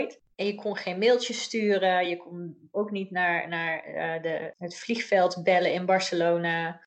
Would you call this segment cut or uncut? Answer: uncut